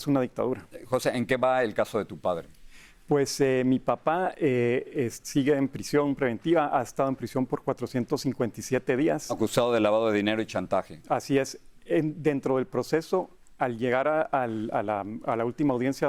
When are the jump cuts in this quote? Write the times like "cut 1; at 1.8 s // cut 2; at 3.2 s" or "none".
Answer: none

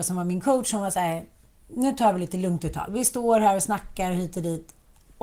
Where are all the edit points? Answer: none

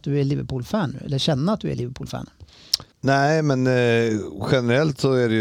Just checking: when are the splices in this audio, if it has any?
cut 1; at 2.9 s

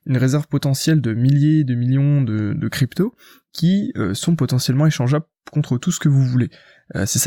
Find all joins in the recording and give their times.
none

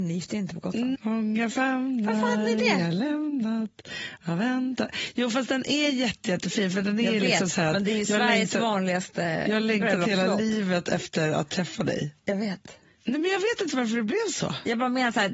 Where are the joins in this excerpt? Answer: cut 1; at 0.9 s

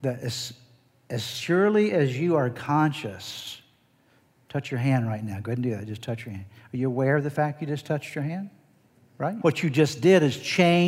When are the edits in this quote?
cut 1; at 9.4 s

